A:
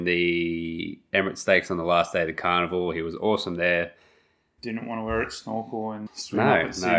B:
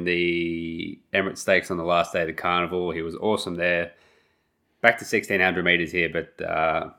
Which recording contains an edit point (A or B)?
A